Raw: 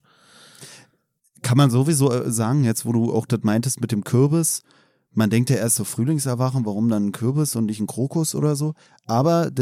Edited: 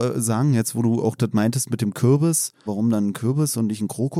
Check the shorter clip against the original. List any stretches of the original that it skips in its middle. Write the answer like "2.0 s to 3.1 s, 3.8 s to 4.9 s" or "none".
4.8 s to 6.6 s